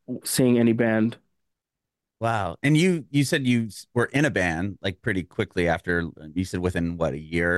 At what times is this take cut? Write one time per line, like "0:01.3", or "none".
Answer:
none